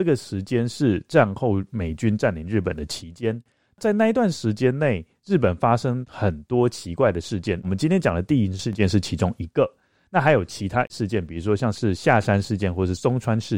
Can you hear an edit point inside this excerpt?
no; 0 cuts

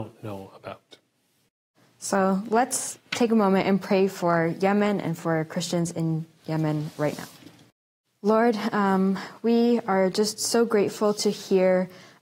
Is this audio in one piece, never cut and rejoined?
yes; 0 cuts

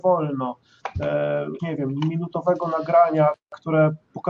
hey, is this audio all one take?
no; 1 cut; at 1.6 s

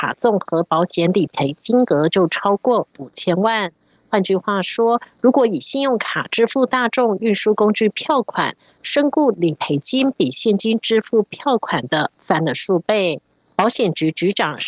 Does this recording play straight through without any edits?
yes; 0 cuts

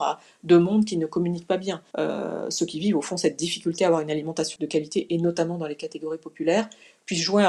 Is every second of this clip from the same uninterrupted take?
no; 2 cuts; at 1.9 s, 4.6 s

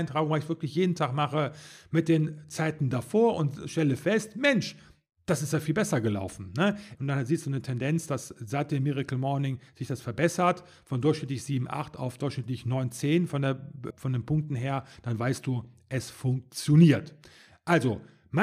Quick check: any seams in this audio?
yes; 2 cuts; at 7.0 s, 13.9 s

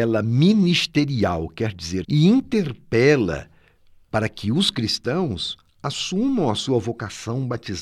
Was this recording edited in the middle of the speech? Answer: yes; 1 cut; at 2.0 s

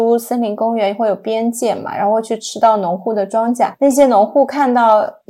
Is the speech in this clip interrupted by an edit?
no; 0 cuts

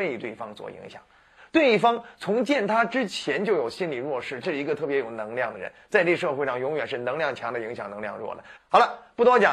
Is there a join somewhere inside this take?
yes; 3 cuts; at 1.4 s, 4.4 s, 8.5 s

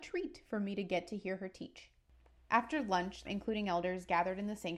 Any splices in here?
yes; 1 cut; at 3.2 s

